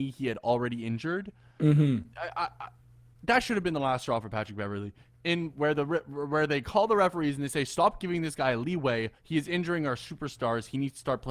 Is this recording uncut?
yes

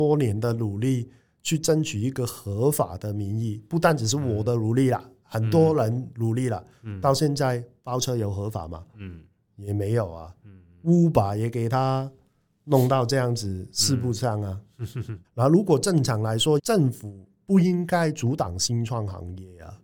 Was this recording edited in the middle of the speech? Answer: yes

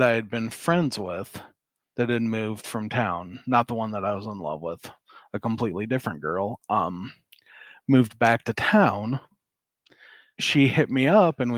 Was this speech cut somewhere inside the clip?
no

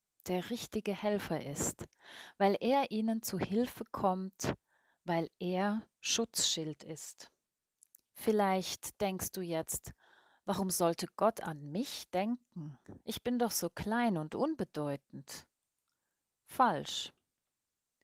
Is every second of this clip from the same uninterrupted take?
yes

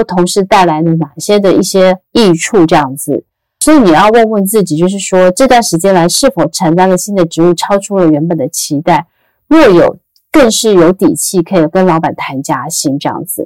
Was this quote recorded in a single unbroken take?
yes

